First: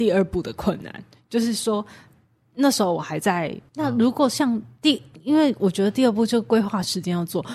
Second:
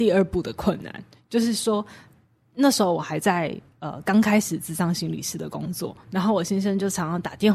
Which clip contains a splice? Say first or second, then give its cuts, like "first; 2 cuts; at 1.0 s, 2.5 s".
first; 1 cut; at 3.7 s